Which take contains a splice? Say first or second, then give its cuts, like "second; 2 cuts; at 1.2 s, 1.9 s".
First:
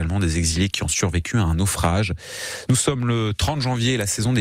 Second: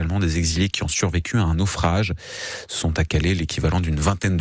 first; 1 cut; at 2.7 s